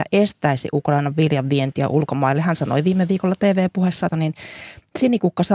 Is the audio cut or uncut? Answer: cut